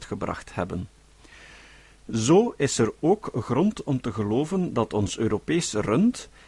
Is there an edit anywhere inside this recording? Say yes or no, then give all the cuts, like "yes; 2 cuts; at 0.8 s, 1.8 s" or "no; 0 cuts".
no; 0 cuts